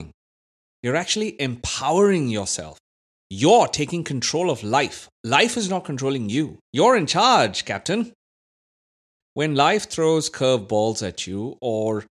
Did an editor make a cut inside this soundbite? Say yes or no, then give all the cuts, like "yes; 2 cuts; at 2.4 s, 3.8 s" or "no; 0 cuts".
yes; 2 cuts; at 6.6 s, 9.2 s